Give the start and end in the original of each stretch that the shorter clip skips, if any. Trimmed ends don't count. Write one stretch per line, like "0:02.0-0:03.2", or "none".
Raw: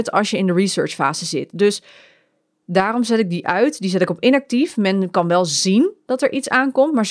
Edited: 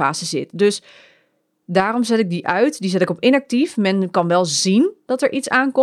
none